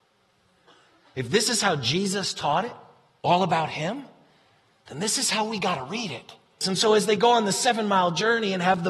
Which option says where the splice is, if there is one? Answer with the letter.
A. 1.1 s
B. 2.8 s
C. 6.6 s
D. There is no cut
C